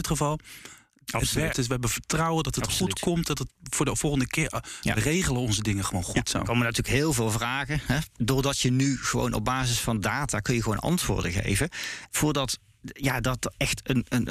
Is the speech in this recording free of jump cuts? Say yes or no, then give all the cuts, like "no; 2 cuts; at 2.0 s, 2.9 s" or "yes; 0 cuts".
no; 2 cuts; at 1.5 s, 12.1 s